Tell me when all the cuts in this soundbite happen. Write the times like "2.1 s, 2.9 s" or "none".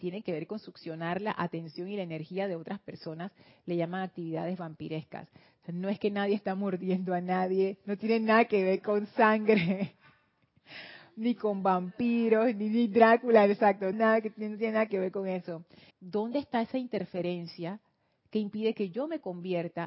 13.9 s, 15.9 s